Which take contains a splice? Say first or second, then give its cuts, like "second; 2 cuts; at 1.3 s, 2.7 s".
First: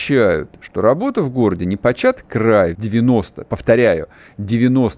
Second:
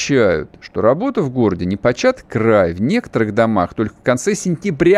first; 1 cut; at 2.7 s